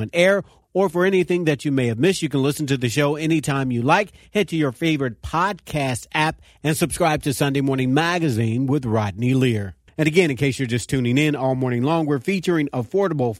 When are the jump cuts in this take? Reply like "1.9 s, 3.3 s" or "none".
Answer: 9.9 s